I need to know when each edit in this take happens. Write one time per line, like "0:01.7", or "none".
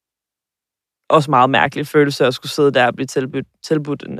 none